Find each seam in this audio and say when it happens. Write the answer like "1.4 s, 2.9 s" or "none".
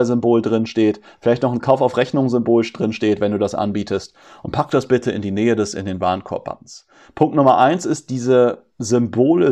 7.0 s